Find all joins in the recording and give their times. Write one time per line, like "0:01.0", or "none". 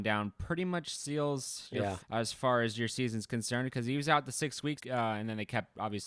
0:02.0
0:04.8